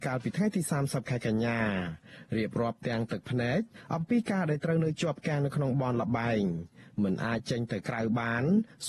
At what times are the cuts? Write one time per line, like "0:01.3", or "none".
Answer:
none